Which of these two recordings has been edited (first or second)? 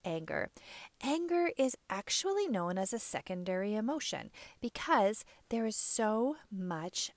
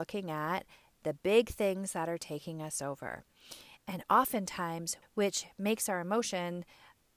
second